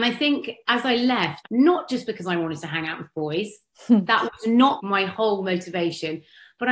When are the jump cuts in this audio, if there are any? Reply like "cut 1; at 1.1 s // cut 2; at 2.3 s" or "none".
cut 1; at 1.4 s